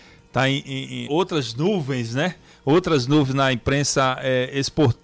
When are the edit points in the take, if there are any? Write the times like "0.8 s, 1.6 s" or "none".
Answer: 1.1 s

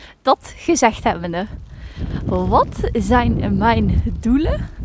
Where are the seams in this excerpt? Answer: none

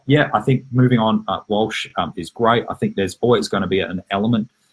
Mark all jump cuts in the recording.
none

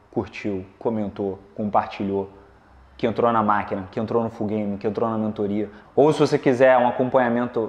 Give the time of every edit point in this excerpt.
5.8 s

